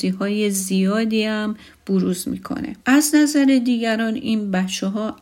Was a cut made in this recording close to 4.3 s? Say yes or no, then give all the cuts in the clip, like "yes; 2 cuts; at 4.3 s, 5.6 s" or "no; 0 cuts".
no; 1 cut; at 2.8 s